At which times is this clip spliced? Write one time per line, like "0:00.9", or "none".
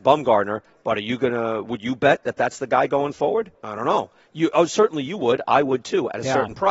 0:03.5